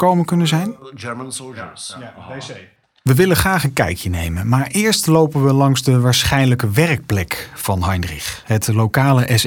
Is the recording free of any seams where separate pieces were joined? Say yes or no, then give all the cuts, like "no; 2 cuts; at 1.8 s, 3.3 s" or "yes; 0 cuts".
yes; 0 cuts